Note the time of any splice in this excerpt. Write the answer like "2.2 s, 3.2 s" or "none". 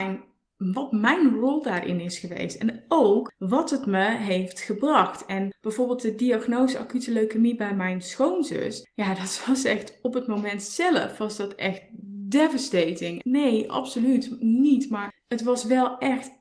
13.2 s